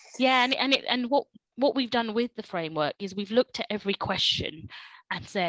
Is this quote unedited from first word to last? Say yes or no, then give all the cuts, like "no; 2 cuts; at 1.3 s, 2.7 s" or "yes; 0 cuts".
yes; 0 cuts